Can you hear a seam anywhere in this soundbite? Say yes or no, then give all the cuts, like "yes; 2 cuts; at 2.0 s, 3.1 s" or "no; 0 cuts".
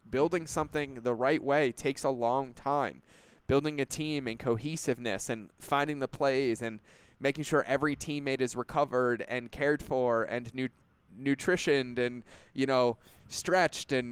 no; 0 cuts